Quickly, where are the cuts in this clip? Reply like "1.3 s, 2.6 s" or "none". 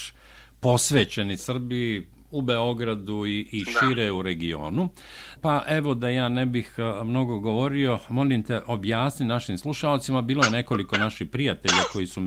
5.4 s